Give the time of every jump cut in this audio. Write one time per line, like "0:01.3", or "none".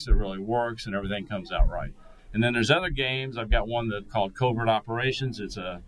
0:04.1